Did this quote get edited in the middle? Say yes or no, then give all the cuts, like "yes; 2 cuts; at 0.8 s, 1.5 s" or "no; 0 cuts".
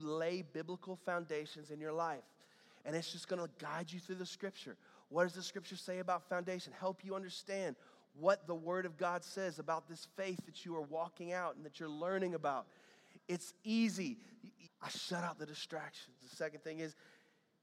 yes; 2 cuts; at 14.7 s, 16.2 s